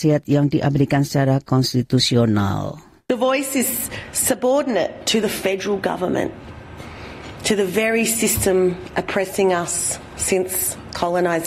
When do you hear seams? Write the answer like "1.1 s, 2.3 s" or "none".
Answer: none